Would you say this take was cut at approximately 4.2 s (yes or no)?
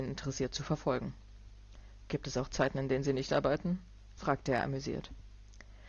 no